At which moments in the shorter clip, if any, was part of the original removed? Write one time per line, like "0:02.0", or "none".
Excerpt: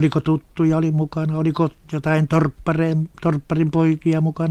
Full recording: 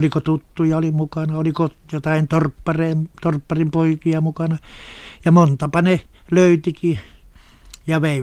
none